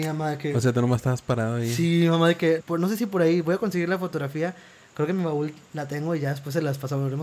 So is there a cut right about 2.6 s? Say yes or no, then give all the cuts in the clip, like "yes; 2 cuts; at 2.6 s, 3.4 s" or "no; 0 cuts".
yes; 1 cut; at 2.6 s